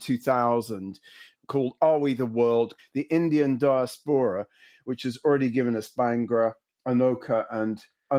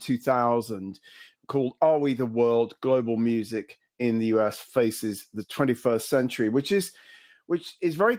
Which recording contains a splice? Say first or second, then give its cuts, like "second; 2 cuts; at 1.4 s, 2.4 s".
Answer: first; 1 cut; at 2.8 s